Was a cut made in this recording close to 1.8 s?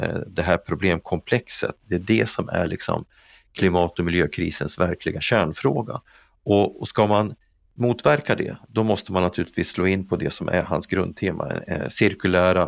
yes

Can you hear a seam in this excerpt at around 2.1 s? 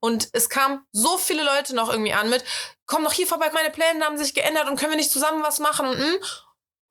no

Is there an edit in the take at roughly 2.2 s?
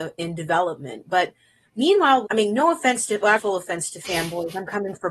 yes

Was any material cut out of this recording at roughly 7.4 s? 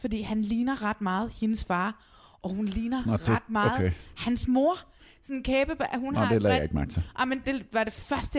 yes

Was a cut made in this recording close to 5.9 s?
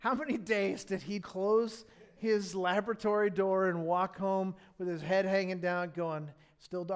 no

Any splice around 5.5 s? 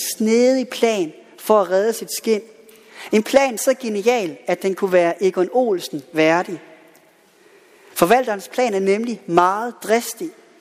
no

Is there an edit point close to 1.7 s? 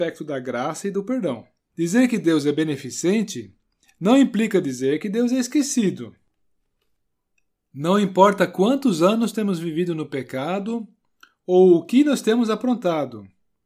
yes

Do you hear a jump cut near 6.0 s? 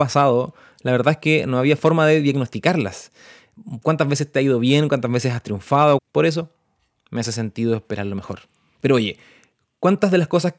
yes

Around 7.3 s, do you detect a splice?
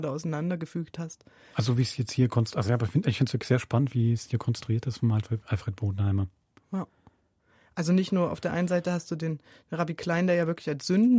no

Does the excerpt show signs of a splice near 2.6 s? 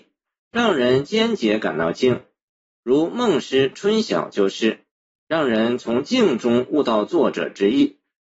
no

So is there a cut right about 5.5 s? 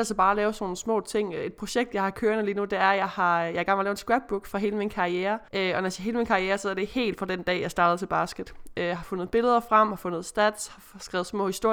yes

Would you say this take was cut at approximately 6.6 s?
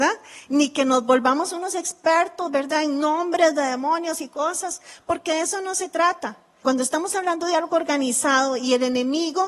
yes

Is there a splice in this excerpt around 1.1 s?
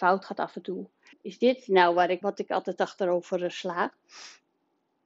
yes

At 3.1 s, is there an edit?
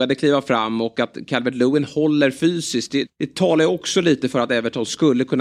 yes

